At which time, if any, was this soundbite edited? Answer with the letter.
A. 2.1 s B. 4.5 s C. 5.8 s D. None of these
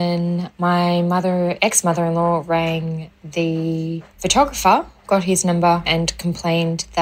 C